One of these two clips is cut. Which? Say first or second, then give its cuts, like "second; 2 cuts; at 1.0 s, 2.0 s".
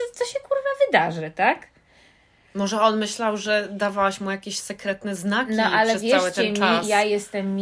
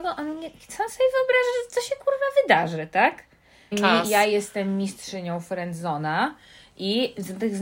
second; 1 cut; at 3.7 s